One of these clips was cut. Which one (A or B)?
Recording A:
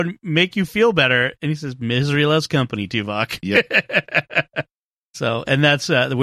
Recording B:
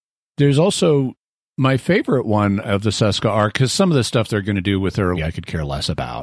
B